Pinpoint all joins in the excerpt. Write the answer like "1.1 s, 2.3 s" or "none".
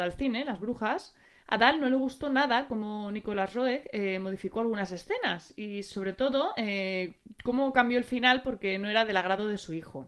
none